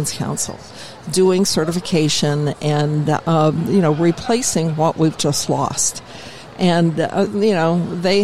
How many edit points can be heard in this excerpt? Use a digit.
1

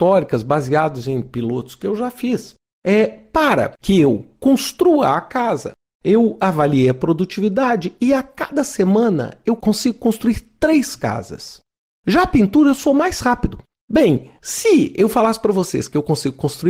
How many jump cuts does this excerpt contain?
1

